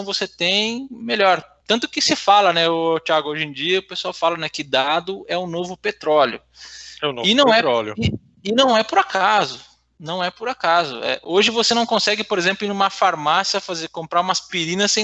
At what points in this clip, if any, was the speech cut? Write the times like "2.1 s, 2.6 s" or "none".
none